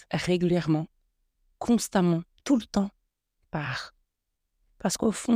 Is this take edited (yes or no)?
no